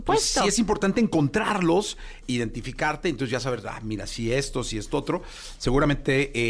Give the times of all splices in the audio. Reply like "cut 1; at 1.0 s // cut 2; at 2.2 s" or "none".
cut 1; at 2.2 s